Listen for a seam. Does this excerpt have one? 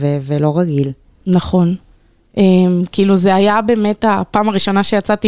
no; 0 cuts

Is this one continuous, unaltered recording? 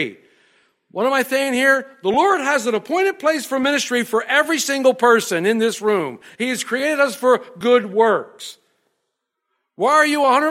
no; 1 cut; at 6.3 s

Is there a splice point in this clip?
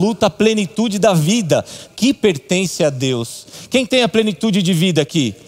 yes; 1 cut; at 1.9 s

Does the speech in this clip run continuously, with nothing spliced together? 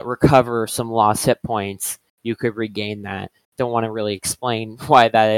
no; 1 cut; at 3.4 s

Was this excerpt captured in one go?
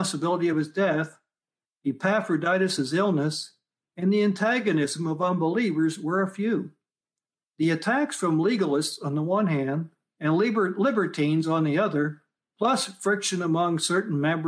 yes; 0 cuts

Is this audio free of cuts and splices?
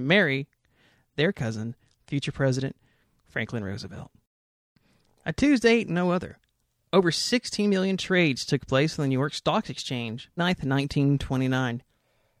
no; 2 cuts; at 5.9 s, 10.4 s

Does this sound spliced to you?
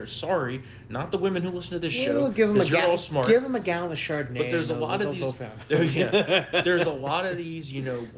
no; 0 cuts

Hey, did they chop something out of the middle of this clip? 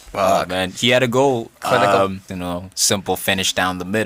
yes; 1 cut; at 2.3 s

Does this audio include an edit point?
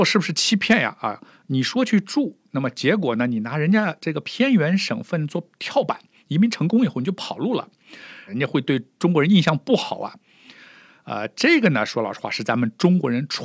yes; 1 cut; at 8.3 s

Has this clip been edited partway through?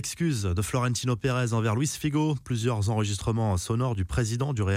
no; 0 cuts

